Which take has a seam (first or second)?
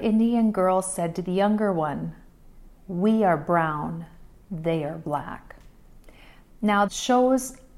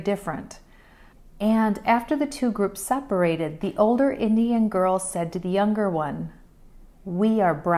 first